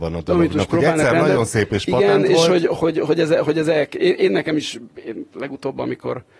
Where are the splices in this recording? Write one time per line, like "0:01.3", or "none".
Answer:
0:02.8